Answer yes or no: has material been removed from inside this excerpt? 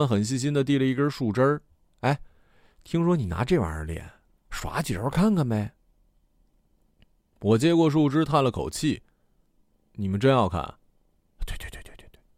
no